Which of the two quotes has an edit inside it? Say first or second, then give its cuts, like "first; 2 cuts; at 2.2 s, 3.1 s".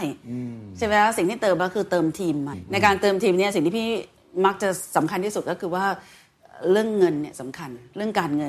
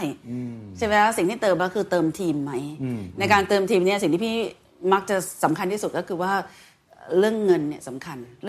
first; 1 cut; at 2.5 s